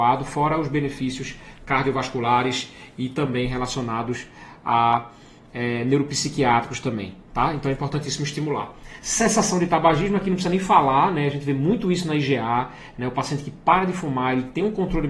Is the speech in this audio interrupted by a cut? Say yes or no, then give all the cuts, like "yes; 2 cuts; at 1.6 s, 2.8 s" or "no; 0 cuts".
no; 0 cuts